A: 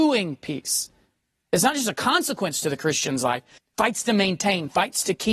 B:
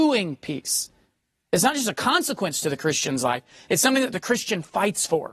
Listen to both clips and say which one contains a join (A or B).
A